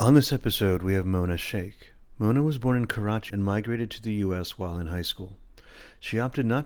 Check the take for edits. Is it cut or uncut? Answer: cut